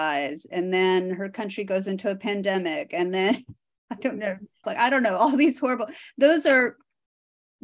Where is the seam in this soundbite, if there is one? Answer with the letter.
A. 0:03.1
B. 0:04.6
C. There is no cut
B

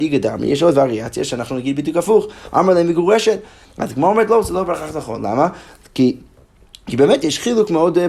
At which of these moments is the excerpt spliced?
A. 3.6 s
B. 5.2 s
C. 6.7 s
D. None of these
A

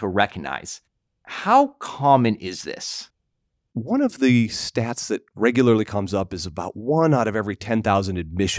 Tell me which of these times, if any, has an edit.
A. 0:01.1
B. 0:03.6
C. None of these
B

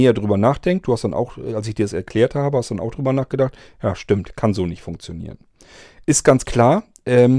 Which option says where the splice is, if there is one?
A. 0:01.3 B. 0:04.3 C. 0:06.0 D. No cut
B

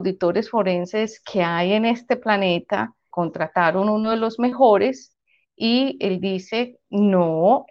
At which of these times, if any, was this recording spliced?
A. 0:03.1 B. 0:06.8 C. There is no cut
A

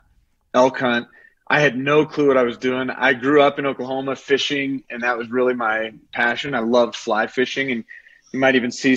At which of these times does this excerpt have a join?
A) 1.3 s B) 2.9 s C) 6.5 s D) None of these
D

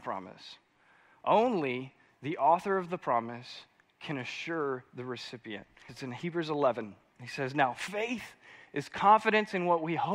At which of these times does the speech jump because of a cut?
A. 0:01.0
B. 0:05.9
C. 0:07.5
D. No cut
B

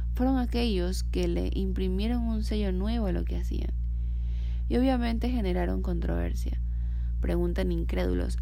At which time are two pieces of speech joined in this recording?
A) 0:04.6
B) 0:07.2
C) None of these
B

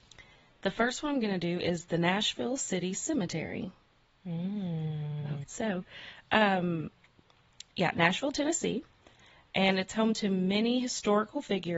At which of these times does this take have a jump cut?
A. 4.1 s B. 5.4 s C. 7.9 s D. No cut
B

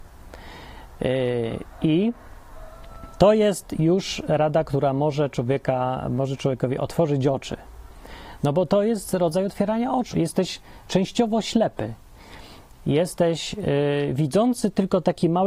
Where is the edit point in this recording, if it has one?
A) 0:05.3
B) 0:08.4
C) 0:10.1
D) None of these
C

